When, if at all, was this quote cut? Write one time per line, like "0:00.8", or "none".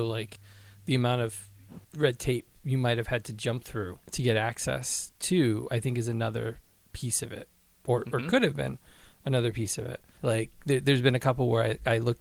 0:04.0
0:10.2